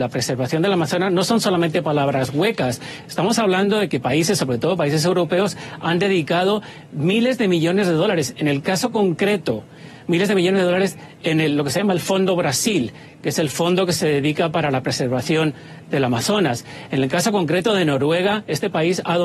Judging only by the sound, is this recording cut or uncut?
uncut